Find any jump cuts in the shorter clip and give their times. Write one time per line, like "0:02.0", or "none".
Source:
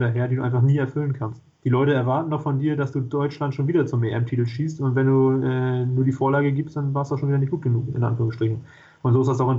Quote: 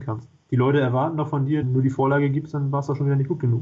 0:01.6